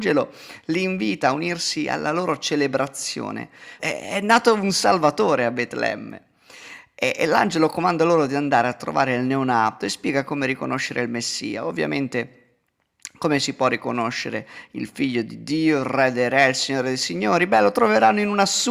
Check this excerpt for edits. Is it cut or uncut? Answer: cut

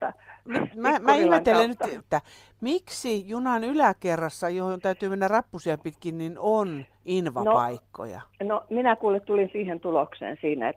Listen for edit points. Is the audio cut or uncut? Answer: cut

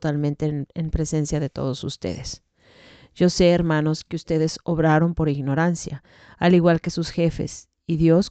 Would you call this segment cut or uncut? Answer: uncut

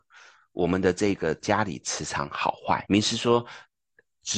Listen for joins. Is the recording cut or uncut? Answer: cut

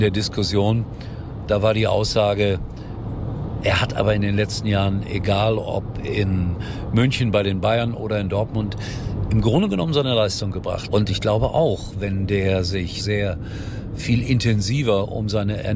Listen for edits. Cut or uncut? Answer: cut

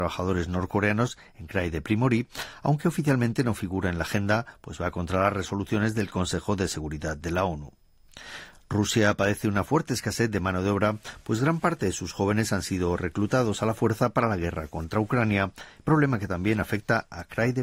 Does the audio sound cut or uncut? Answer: uncut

